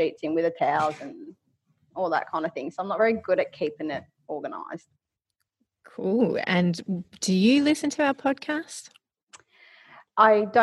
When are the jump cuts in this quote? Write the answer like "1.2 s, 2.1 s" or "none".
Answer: none